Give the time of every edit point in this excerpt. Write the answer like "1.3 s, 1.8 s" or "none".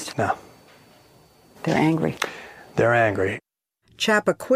none